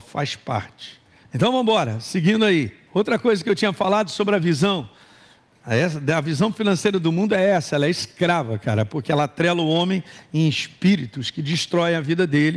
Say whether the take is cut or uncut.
cut